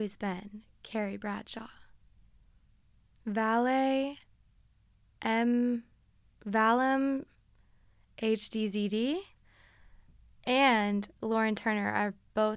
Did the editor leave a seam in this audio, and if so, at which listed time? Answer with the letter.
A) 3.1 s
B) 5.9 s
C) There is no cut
C